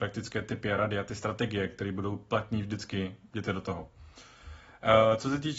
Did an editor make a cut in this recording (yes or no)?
no